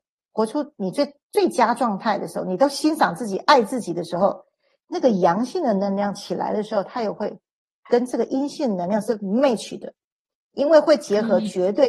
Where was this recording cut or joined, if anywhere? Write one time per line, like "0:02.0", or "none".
none